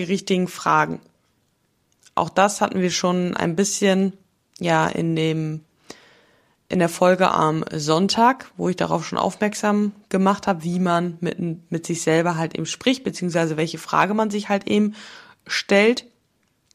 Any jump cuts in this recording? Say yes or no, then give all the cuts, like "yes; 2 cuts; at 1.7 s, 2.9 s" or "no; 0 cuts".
no; 0 cuts